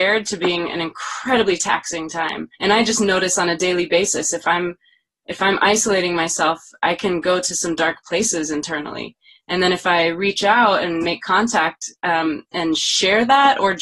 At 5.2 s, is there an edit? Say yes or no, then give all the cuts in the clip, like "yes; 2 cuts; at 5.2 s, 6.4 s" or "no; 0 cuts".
no; 1 cut; at 2.5 s